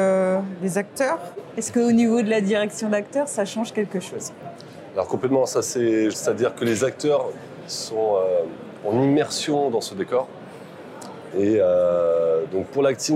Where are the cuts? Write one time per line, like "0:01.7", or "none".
0:06.1
0:11.3